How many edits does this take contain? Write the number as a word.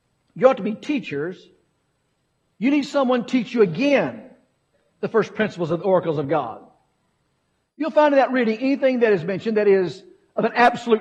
zero